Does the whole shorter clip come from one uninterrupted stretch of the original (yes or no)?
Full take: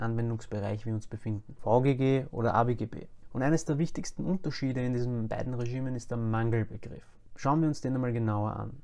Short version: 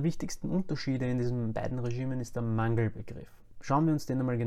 yes